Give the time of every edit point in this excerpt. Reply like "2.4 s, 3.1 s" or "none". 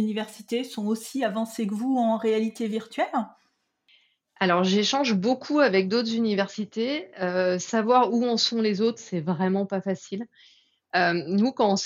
none